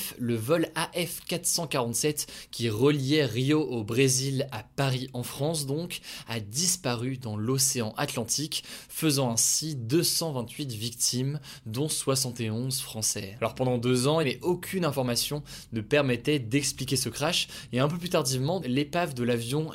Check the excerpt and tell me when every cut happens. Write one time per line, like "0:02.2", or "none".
0:14.2
0:18.6

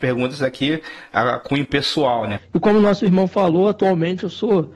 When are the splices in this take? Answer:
0:02.4

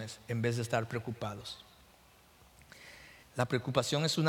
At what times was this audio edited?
0:03.2

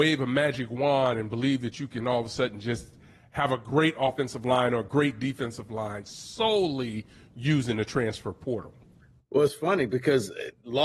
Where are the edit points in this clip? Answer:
none

